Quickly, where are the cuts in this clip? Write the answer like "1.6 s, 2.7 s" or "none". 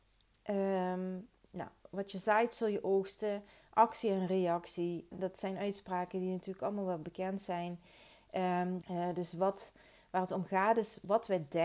5.1 s, 8.8 s